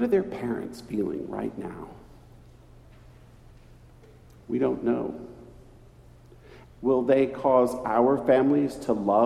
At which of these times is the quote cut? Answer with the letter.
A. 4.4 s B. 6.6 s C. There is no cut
B